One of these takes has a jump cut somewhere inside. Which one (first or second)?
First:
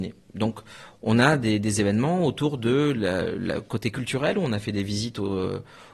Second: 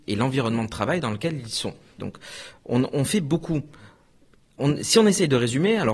second